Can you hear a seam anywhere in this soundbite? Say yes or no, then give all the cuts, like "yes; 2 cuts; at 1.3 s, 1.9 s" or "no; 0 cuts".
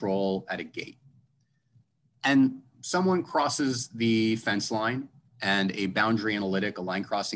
no; 0 cuts